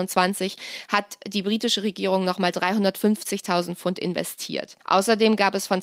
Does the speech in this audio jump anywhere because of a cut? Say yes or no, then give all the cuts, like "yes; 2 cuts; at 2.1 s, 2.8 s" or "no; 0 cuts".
yes; 1 cut; at 4.8 s